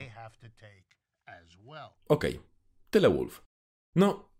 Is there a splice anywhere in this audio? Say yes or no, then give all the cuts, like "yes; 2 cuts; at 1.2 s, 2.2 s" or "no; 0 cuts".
yes; 1 cut; at 2.0 s